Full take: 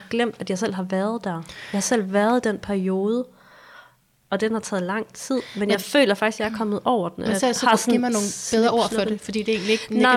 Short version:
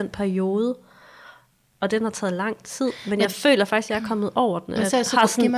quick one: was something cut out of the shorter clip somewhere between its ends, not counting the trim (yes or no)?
no